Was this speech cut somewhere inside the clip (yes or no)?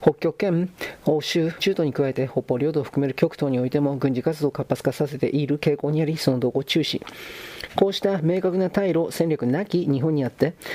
yes